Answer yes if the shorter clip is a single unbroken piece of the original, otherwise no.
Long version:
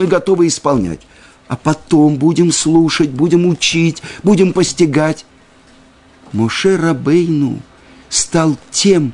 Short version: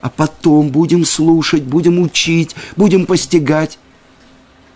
yes